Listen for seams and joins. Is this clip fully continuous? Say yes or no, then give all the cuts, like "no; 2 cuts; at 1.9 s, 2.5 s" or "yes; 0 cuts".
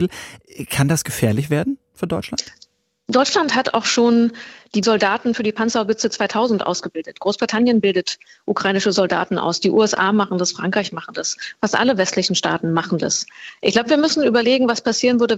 yes; 0 cuts